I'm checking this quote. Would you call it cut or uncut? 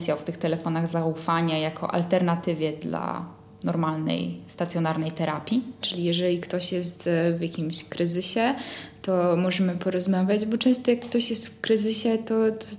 cut